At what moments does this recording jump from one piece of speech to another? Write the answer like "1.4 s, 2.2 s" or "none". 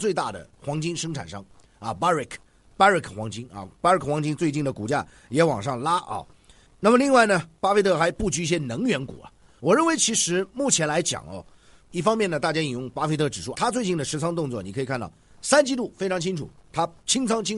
11.8 s, 13.5 s